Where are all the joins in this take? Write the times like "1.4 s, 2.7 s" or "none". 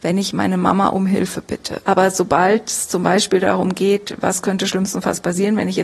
1.8 s